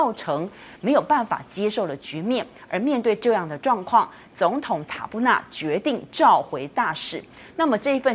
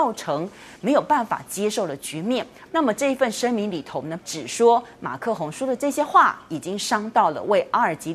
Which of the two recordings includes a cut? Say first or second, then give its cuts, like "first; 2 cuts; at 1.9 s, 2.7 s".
second; 2 cuts; at 2.7 s, 4.2 s